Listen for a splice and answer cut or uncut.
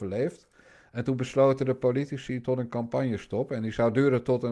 uncut